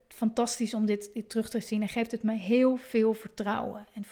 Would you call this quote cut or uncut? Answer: uncut